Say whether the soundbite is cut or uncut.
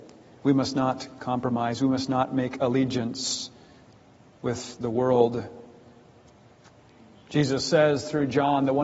uncut